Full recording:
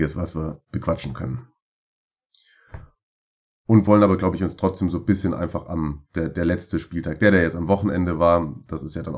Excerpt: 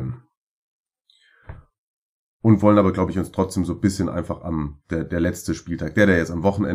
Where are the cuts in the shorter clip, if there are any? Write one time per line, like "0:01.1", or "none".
none